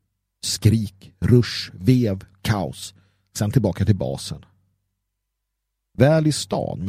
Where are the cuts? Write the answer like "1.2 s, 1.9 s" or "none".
none

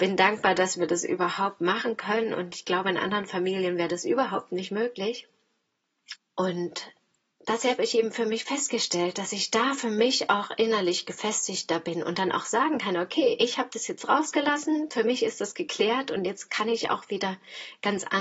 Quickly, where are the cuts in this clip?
6.2 s

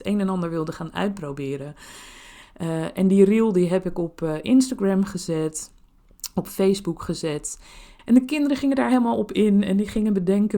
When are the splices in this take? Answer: 2.4 s, 8.0 s

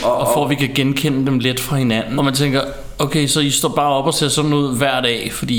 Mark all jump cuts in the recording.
2.2 s

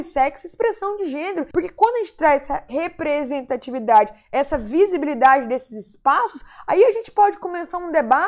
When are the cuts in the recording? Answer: 1.5 s

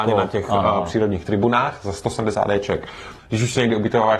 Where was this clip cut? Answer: 3.2 s

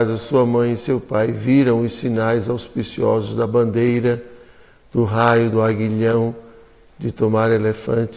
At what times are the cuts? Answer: none

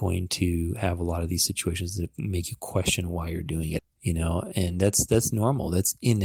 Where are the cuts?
3.8 s

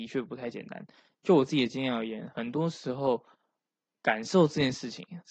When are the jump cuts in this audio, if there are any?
none

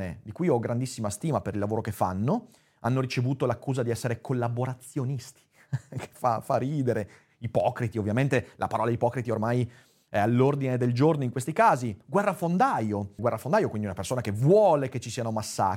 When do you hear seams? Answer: 13.2 s

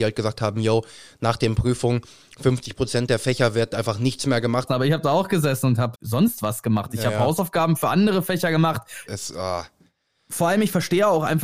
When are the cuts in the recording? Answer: 4.7 s, 5.9 s, 9.1 s

